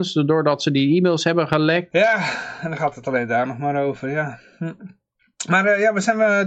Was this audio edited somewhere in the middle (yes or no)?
yes